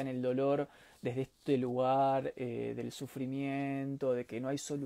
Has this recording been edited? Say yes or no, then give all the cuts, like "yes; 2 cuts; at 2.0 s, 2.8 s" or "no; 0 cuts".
no; 0 cuts